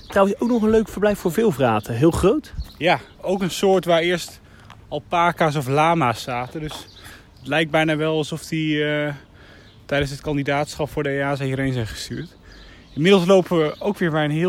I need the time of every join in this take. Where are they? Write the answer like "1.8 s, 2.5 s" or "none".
3.1 s